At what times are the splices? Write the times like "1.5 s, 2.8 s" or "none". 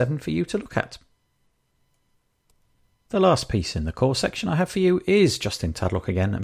none